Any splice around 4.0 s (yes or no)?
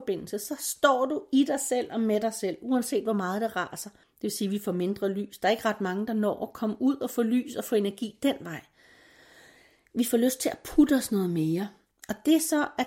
yes